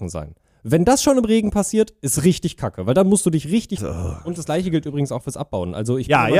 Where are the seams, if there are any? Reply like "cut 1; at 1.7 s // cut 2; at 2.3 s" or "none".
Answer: cut 1; at 3.8 s